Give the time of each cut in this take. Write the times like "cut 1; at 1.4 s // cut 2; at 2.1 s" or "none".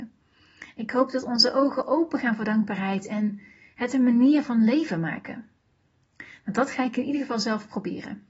none